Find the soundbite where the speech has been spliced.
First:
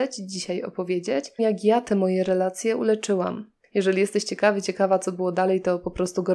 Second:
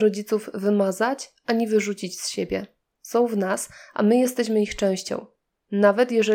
first; 2 cuts; at 1.4 s, 3.6 s

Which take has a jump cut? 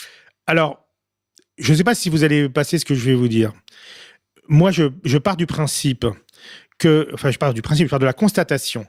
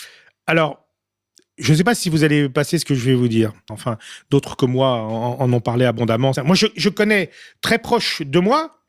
second; 2 cuts; at 3.7 s, 6.3 s

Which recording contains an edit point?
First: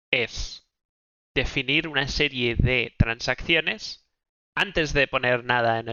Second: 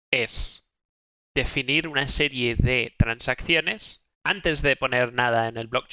second; 1 cut; at 4.1 s

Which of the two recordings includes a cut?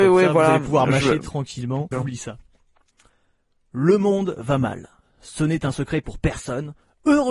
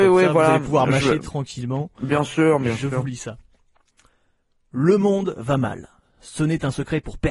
first; 1 cut; at 1.9 s

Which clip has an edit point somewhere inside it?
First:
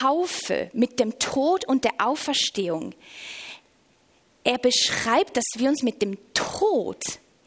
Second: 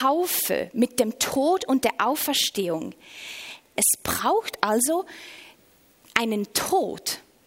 second; 1 cut; at 3.8 s

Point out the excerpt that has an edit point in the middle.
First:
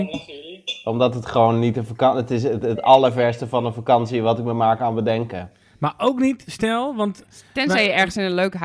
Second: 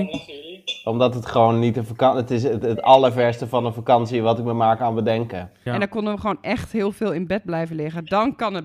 second; 1 cut; at 5.7 s

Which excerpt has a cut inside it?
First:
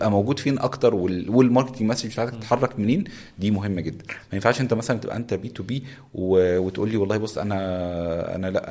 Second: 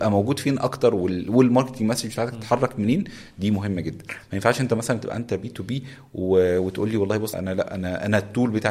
second; 1 cut; at 7.3 s

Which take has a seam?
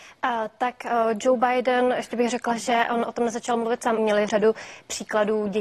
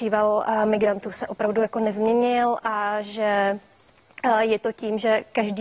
first; 1 cut; at 4.0 s

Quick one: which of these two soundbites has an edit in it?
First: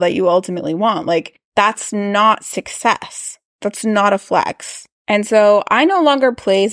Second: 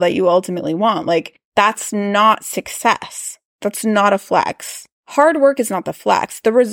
second; 1 cut; at 5.0 s

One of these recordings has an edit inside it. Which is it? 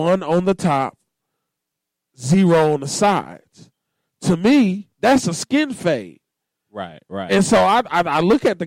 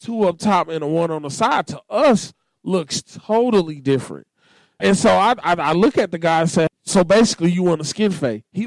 second; 2 cuts; at 4.8 s, 6.7 s

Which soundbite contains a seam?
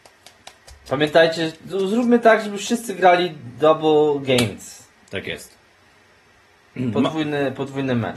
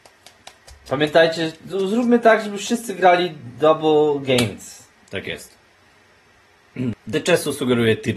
second; 1 cut; at 6.9 s

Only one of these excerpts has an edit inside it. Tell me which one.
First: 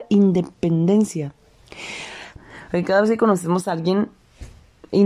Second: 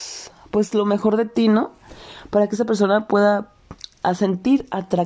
first; 1 cut; at 2.4 s

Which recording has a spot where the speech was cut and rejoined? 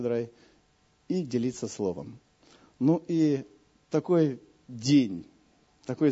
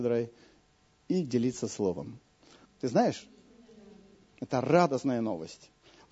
second; 1 cut; at 2.6 s

